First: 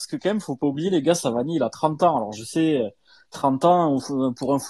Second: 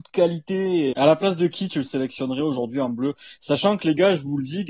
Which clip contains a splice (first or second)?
second